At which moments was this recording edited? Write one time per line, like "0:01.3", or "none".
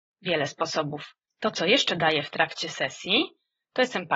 0:01.3